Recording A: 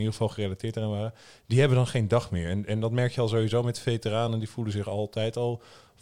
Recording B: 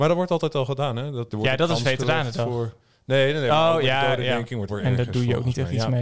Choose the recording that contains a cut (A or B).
B